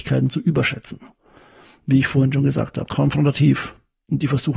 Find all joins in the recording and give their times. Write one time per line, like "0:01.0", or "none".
0:02.9

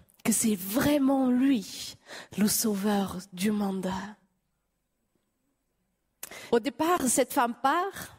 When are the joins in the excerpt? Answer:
0:06.5

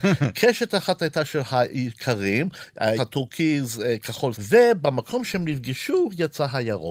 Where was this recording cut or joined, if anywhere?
0:03.0
0:04.3

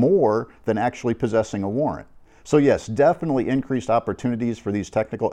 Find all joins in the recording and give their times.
none

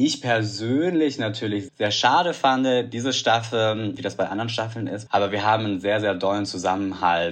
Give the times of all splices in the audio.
0:01.7
0:04.0
0:05.1

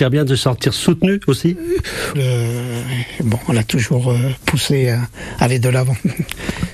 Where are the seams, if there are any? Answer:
0:02.1
0:03.4

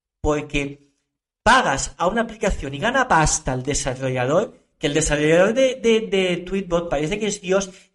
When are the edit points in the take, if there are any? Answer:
none

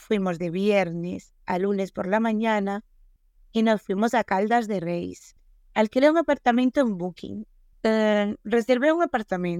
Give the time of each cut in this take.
0:07.7

